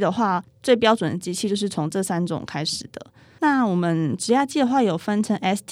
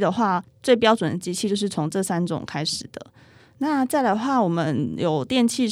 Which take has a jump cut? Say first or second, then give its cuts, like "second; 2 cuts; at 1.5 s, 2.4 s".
first; 1 cut; at 3.4 s